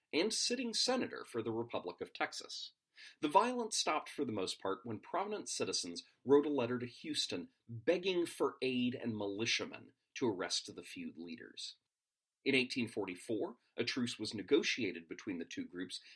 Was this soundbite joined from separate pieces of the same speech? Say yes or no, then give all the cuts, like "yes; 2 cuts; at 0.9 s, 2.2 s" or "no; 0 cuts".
no; 0 cuts